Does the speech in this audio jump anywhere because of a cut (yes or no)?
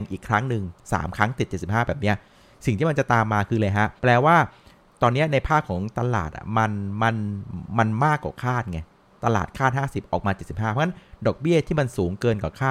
yes